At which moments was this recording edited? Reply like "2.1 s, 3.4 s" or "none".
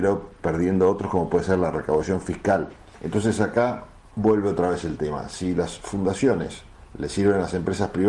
none